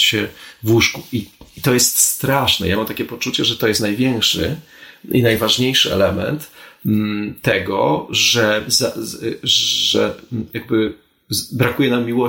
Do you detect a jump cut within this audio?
no; 0 cuts

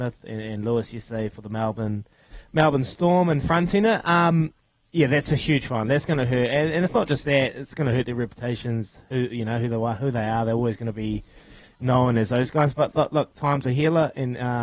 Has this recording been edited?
no; 0 cuts

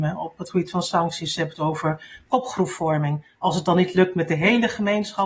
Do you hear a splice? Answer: no; 0 cuts

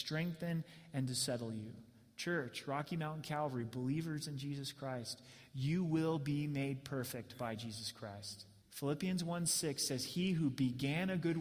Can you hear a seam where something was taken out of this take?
yes; 1 cut; at 8.6 s

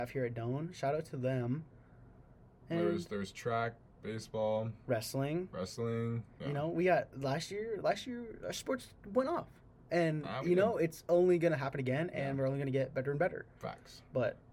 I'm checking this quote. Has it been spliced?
yes; 1 cut; at 6.4 s

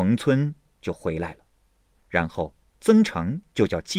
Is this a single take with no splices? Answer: yes; 0 cuts

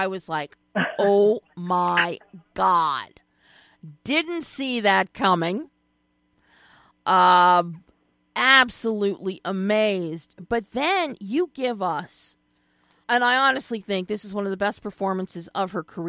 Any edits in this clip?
yes; 1 cut; at 13.0 s

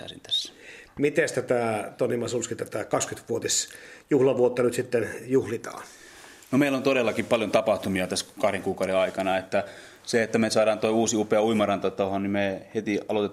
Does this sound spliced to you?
no; 0 cuts

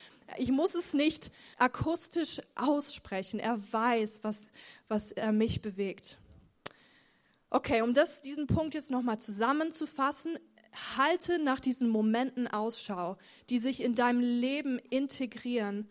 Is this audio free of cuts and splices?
no; 1 cut; at 1.5 s

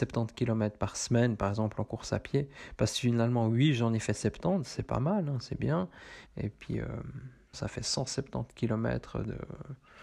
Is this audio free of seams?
no; 2 cuts; at 6.2 s, 7.5 s

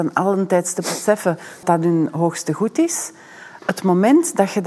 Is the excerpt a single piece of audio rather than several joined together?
no; 1 cut; at 1.6 s

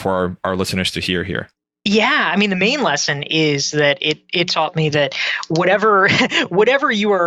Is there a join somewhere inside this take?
no; 0 cuts

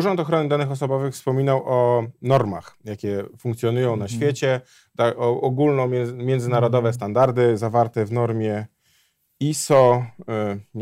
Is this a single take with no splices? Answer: yes; 0 cuts

